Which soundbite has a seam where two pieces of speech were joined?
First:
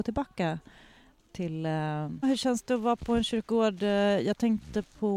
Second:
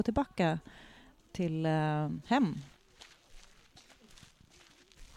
first; 1 cut; at 2.2 s

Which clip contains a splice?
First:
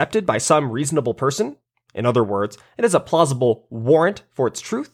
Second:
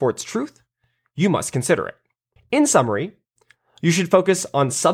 second; 1 cut; at 2.4 s

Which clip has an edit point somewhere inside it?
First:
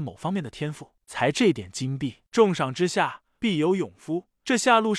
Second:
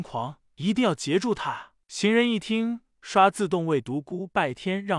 first; 2 cuts; at 1.0 s, 2.3 s

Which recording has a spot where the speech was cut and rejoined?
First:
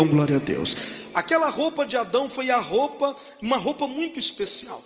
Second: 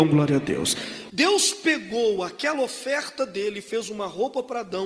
second; 1 cut; at 1.1 s

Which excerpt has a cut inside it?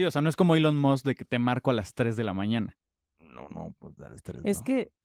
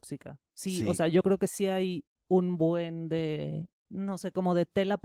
second; 1 cut; at 3.8 s

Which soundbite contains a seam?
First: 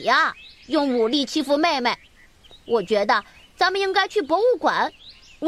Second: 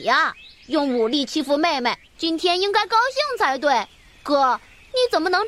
second; 1 cut; at 2.1 s

